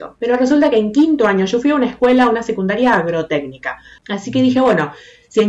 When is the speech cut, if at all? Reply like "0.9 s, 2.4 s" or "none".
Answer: 4.0 s